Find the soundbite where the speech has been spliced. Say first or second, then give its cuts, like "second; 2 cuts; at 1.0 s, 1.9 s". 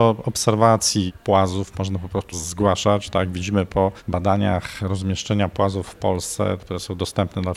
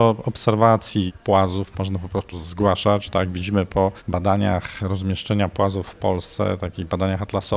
first; 1 cut; at 6.6 s